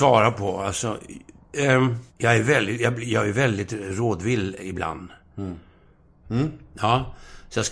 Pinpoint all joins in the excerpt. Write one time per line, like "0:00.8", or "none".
0:02.1
0:06.2

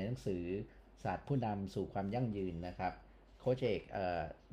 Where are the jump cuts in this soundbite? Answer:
none

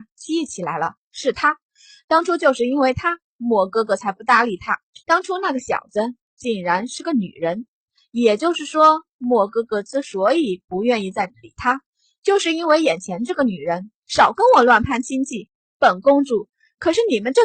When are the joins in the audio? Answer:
0:05.0
0:14.0

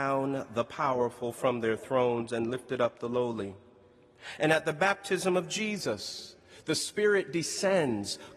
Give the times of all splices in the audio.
none

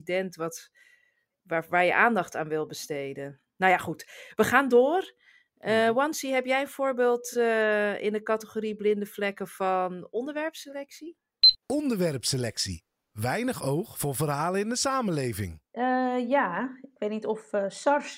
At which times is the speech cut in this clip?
none

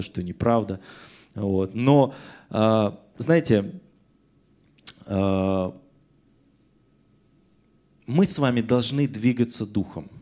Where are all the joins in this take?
none

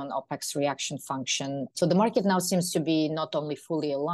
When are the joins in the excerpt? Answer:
0:01.7

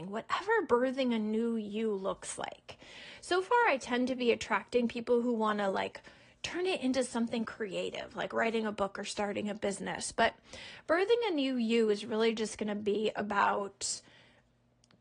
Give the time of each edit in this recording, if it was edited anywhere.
none

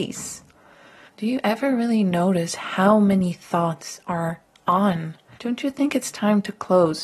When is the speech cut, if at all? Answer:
0:01.1
0:05.3

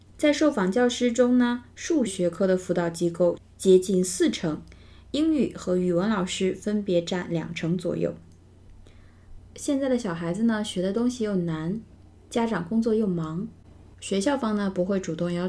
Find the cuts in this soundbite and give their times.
0:02.1
0:09.4
0:13.9

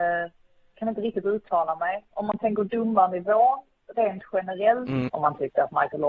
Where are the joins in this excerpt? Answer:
0:05.1

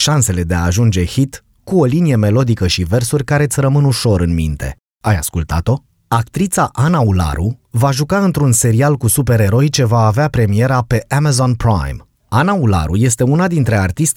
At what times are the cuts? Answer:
none

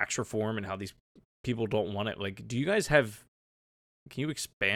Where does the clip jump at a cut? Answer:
none

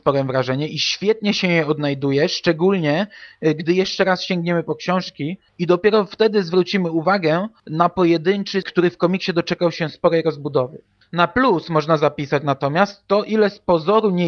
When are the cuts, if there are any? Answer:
0:08.6
0:11.0

